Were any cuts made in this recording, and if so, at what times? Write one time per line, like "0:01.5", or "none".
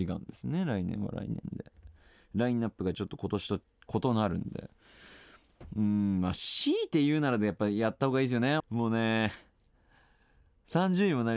0:08.6